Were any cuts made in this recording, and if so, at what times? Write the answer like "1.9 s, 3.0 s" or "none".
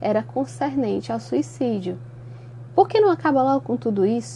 2.7 s

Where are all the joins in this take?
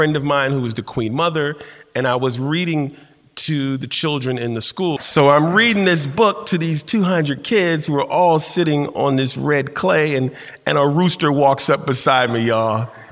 5.0 s

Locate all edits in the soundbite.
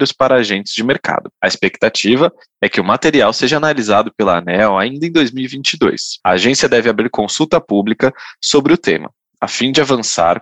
none

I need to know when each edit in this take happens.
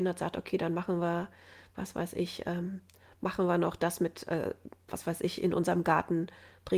none

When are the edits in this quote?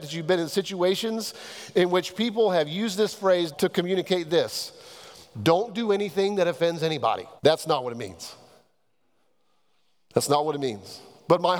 3.5 s, 7.4 s

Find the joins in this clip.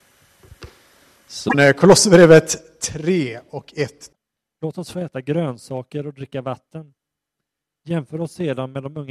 none

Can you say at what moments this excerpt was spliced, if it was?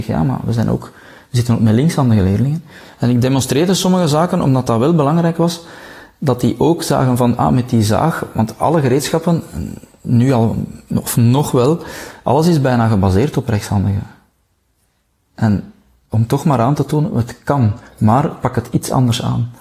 none

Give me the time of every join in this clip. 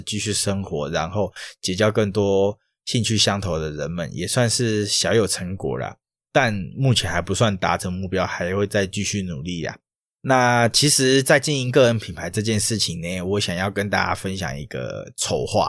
none

